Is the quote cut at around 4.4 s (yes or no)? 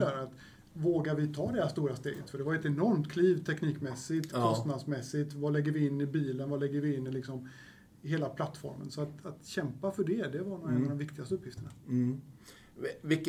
no